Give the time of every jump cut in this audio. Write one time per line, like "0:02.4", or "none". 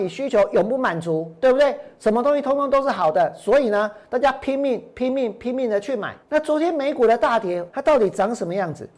0:06.2
0:07.7